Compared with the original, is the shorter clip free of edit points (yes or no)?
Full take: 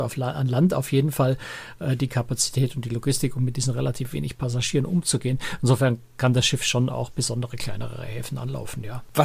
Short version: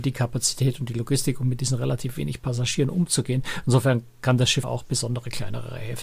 no